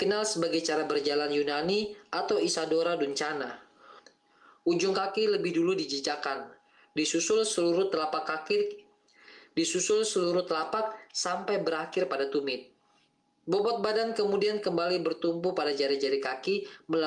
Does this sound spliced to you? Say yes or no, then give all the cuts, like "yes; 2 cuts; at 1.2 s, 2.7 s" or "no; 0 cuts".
no; 0 cuts